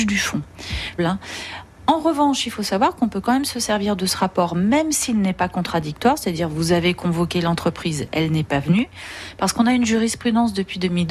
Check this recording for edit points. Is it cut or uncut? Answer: cut